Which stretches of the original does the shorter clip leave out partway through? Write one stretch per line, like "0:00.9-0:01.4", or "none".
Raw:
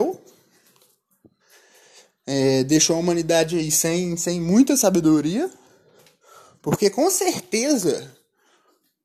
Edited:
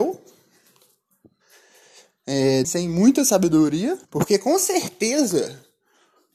0:02.6-0:04.2
0:05.6-0:06.6

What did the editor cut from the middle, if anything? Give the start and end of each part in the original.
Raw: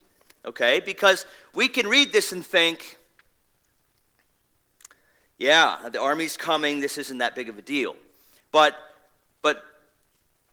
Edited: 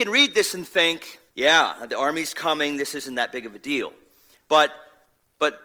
0:03.1-0:05.3

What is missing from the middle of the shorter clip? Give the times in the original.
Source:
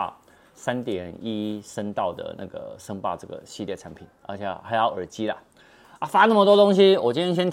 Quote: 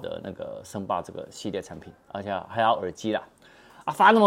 none

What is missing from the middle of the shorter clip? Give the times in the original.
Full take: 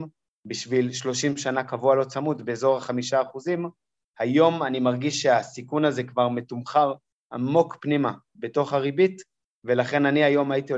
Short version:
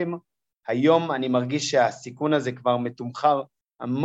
none

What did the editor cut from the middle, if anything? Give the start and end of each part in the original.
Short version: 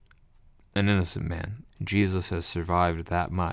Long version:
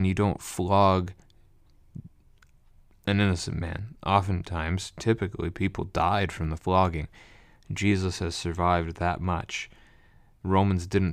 0:04.0-0:07.6

